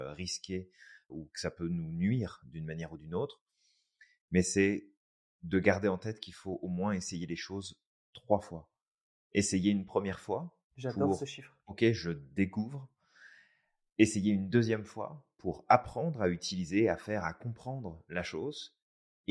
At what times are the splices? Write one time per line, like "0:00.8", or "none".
0:01.1